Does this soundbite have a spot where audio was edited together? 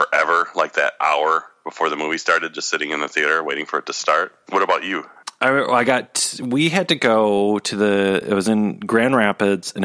yes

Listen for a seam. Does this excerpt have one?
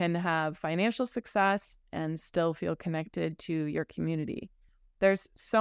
no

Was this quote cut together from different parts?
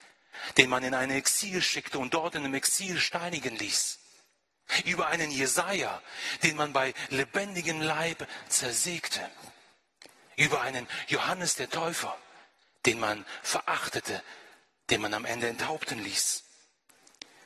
no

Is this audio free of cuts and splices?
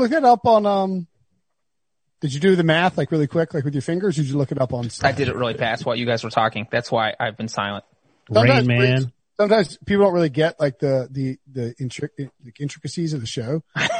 yes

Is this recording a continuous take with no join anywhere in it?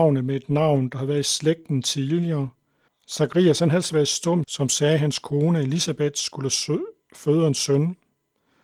no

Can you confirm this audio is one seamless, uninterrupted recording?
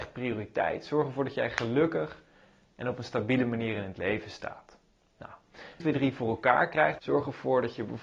no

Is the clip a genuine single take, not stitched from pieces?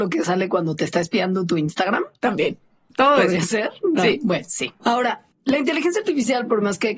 no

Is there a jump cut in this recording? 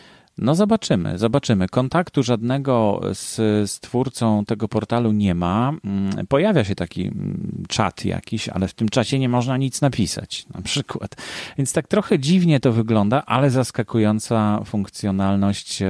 no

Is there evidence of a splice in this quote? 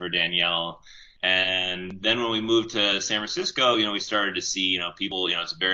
yes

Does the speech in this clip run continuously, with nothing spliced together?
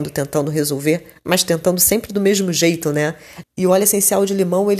no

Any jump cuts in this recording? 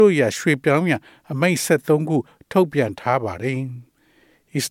no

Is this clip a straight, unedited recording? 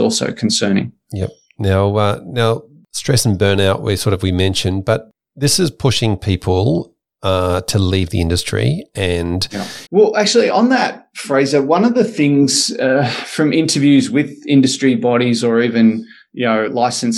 no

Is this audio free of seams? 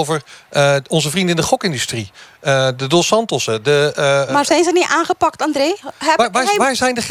no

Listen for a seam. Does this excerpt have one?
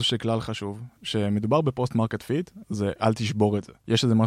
yes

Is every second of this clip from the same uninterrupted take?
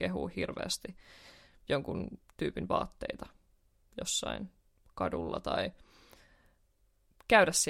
yes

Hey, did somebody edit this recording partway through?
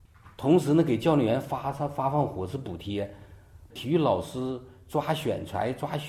yes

